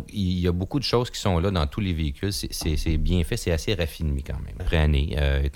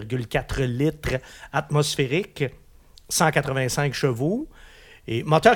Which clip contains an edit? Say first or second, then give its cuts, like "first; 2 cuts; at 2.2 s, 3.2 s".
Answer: first; 1 cut; at 4.6 s